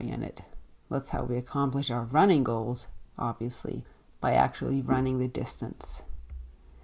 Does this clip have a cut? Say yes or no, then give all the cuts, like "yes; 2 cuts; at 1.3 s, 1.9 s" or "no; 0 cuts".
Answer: no; 0 cuts